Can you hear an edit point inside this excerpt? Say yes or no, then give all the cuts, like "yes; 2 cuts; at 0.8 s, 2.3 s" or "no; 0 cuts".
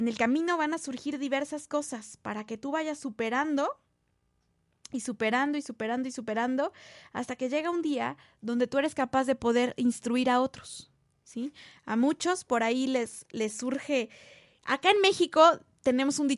no; 0 cuts